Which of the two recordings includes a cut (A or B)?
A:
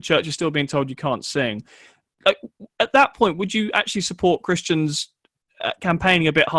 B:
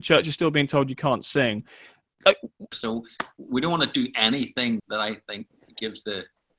B